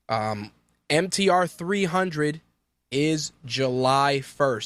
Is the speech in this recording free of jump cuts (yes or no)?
yes